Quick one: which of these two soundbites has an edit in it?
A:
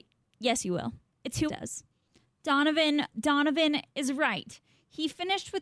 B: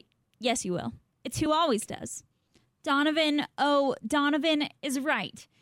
A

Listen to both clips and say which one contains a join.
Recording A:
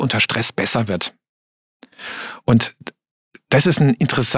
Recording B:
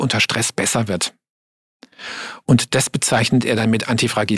B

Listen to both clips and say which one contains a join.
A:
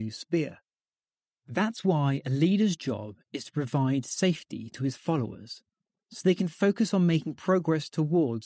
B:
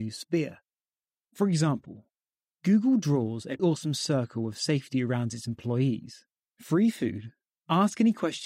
B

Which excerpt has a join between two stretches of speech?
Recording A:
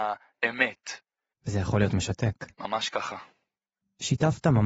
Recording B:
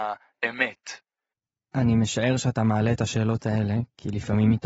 A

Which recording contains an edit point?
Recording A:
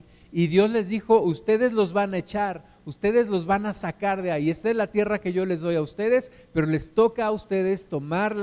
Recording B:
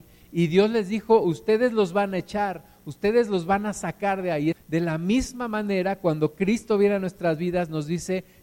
B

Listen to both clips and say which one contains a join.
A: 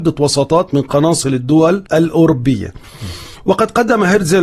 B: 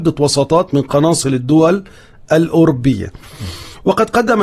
A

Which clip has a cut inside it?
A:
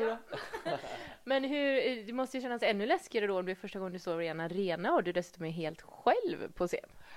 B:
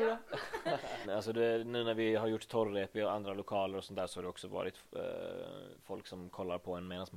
B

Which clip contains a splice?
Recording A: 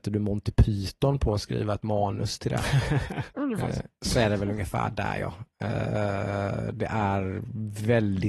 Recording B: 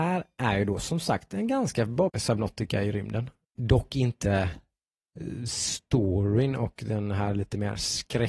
B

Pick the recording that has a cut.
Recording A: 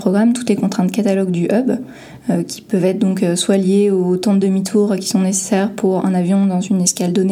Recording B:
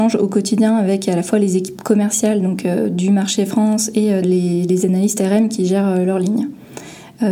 B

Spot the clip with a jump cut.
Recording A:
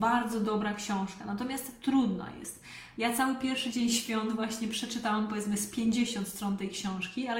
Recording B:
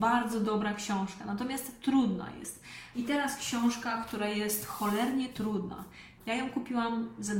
B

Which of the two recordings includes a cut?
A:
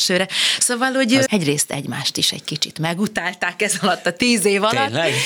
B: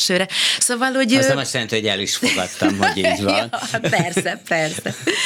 A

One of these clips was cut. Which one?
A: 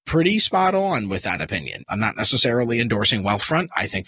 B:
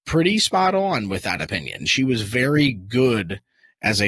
A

